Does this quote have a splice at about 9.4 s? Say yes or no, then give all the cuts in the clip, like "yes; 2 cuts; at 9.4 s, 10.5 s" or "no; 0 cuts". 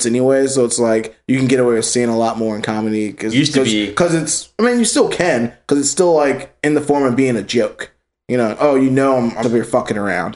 yes; 1 cut; at 9.4 s